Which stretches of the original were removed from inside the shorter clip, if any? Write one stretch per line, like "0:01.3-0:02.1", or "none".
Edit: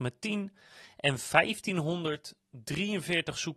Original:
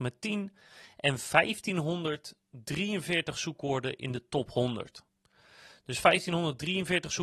none